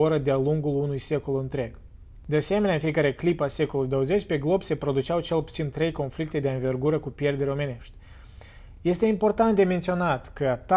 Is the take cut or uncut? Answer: uncut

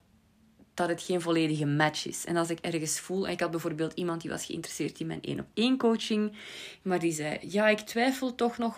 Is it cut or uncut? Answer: uncut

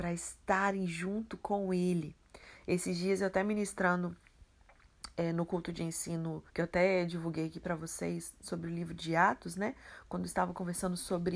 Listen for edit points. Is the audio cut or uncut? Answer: cut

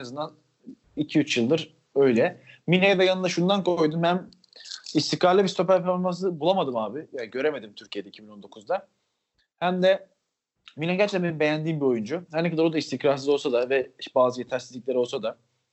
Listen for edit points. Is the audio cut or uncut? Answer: uncut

